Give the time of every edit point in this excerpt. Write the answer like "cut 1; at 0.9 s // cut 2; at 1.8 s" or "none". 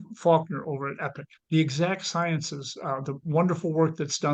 none